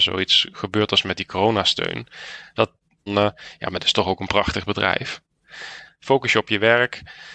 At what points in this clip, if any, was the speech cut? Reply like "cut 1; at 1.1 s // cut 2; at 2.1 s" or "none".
cut 1; at 3.1 s // cut 2; at 5.8 s